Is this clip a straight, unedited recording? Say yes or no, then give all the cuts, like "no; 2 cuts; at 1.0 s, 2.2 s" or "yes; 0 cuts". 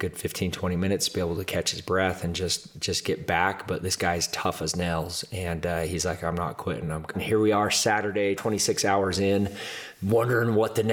no; 2 cuts; at 7.1 s, 8.4 s